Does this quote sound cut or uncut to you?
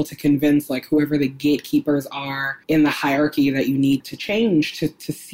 cut